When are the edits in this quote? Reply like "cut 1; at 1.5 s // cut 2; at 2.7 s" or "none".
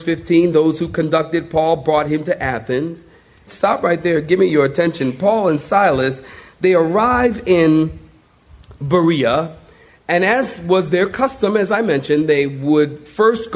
cut 1; at 3.5 s